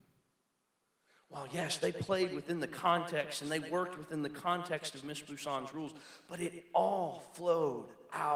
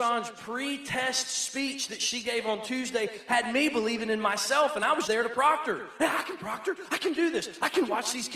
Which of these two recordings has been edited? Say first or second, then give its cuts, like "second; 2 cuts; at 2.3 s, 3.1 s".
second; 1 cut; at 5.1 s